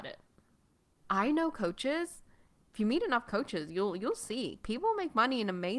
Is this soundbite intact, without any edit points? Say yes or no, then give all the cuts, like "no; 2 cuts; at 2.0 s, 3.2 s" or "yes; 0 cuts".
no; 1 cut; at 1.0 s